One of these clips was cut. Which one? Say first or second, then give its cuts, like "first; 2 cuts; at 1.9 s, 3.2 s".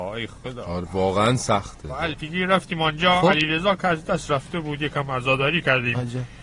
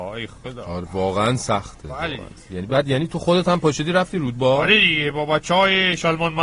first; 1 cut; at 2.1 s